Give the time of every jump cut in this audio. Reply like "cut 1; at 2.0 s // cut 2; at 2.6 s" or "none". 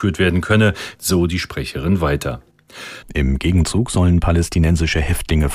cut 1; at 1.0 s // cut 2; at 3.0 s